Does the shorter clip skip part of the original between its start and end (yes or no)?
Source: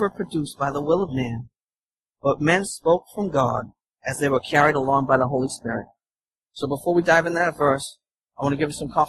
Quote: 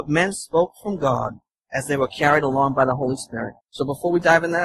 yes